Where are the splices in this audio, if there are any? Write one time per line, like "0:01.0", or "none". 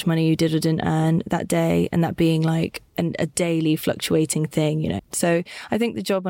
0:05.0